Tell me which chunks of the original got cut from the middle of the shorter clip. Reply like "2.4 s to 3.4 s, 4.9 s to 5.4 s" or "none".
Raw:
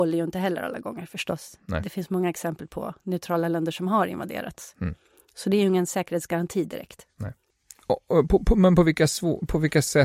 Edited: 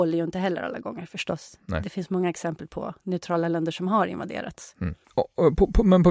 5.0 s to 7.8 s